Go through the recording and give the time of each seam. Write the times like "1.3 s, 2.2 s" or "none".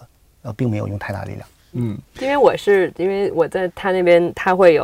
1.7 s